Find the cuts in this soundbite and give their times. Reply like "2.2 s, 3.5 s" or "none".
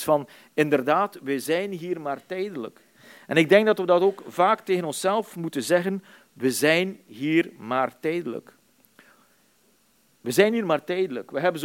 none